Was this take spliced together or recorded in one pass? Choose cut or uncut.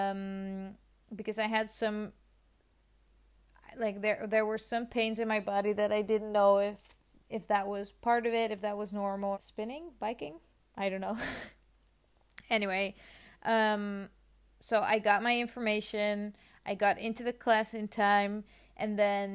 cut